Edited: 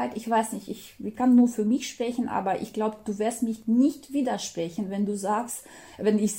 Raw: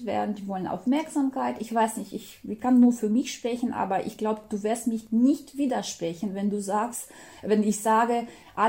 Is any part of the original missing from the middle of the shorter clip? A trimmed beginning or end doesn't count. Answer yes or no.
no